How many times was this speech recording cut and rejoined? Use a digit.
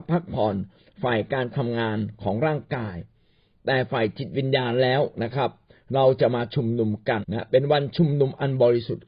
1